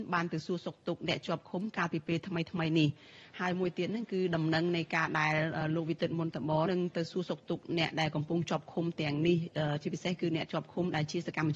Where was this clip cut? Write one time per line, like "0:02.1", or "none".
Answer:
0:06.7